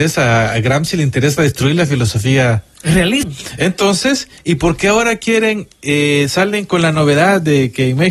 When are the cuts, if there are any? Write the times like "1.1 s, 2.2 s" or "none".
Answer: 3.2 s